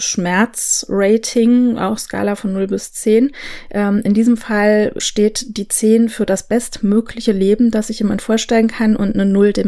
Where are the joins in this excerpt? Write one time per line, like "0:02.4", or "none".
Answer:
0:05.0

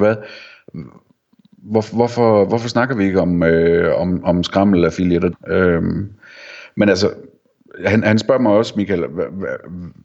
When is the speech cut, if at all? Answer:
0:05.3

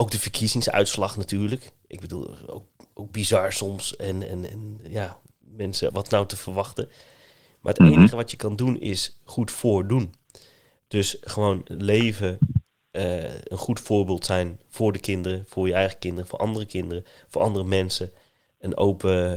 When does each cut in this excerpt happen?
0:05.9

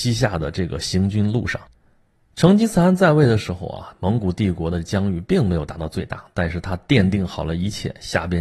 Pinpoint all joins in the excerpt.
none

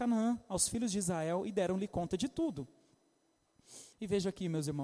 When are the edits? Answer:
0:03.9

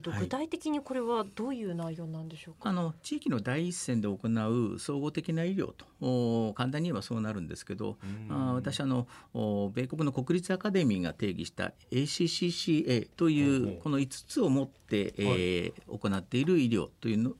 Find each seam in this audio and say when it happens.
0:13.1

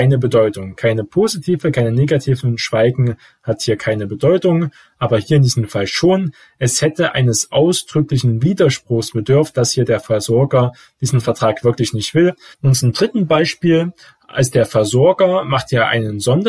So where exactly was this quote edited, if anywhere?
0:12.5

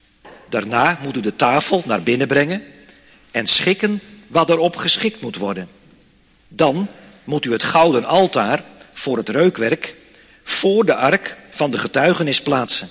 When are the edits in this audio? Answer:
0:06.4

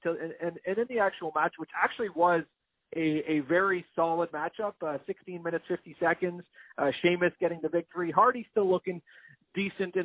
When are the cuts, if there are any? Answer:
none

